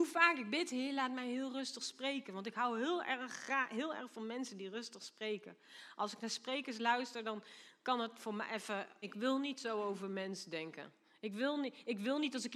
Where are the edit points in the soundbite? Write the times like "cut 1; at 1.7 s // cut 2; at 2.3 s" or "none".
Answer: cut 1; at 9.0 s